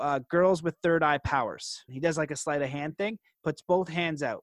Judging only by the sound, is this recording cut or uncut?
cut